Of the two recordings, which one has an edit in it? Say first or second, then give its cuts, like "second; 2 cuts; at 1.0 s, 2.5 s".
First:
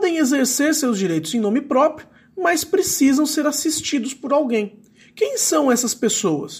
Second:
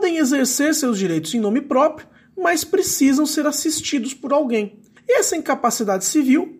second; 1 cut; at 5.0 s